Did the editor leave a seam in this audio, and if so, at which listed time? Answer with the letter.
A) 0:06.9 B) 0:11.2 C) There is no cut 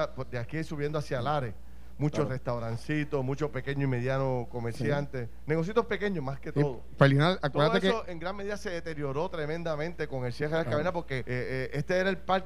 B